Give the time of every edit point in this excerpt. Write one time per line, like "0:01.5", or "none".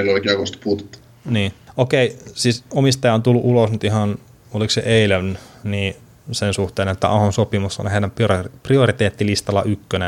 none